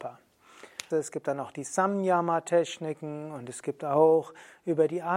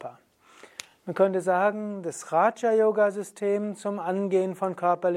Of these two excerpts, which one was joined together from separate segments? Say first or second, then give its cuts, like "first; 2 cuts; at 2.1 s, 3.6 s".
first; 1 cut; at 0.9 s